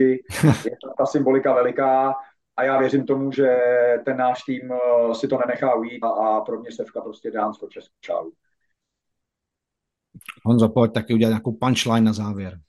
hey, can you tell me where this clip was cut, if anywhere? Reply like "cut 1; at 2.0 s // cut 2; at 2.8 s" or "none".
cut 1; at 6.0 s